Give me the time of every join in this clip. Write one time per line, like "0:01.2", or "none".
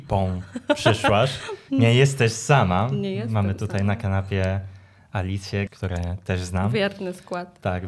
0:05.7